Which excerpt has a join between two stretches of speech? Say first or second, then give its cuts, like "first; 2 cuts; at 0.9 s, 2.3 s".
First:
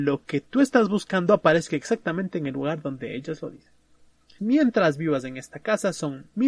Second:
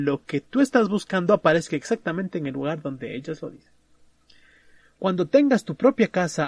first; 1 cut; at 4.4 s